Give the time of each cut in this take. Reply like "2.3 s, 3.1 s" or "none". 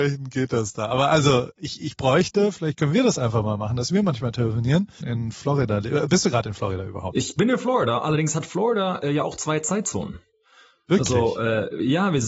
5.0 s